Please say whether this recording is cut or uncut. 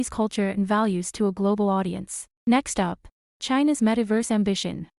cut